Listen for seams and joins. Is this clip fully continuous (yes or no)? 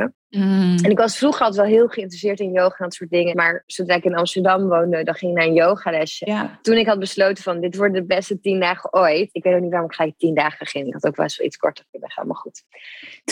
no